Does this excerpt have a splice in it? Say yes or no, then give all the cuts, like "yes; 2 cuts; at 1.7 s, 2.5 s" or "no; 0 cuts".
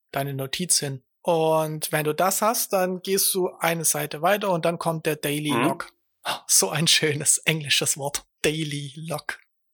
no; 0 cuts